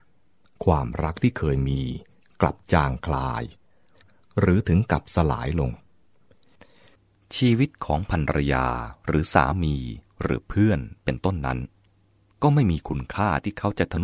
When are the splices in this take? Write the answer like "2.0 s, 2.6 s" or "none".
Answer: none